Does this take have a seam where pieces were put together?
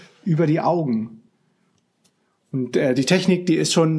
no; 0 cuts

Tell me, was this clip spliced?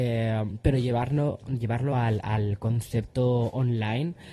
no; 0 cuts

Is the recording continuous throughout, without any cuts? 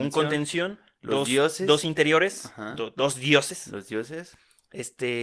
yes; 0 cuts

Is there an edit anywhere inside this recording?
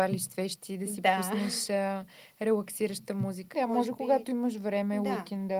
yes; 1 cut; at 3.5 s

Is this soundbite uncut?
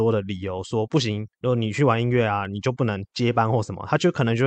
yes; 0 cuts

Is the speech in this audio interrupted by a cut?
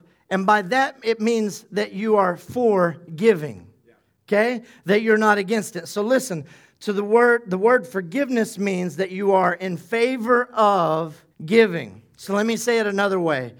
yes; 1 cut; at 11.3 s

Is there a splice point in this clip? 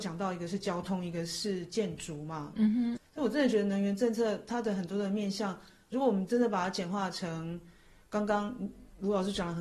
yes; 1 cut; at 3.0 s

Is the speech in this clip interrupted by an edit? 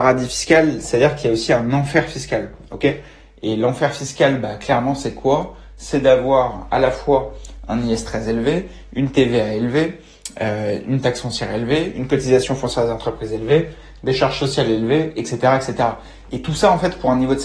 no; 0 cuts

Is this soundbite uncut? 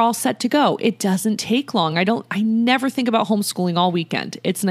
yes; 0 cuts

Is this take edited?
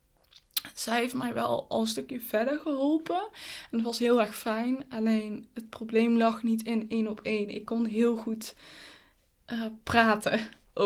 no; 0 cuts

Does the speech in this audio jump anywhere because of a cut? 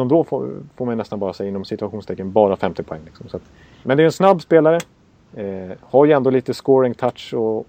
yes; 2 cuts; at 3.8 s, 5.3 s

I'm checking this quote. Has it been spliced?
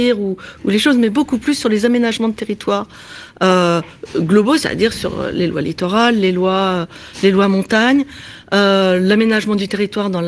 yes; 1 cut; at 4.1 s

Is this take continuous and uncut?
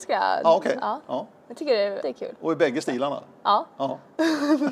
no; 1 cut; at 2.0 s

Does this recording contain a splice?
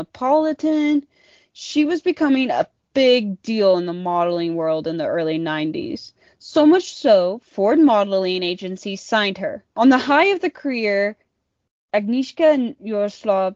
yes; 1 cut; at 9.7 s

